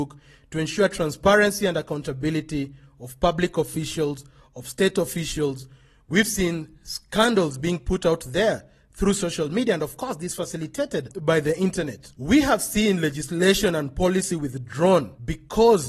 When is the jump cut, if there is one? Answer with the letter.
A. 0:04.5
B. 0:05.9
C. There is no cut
C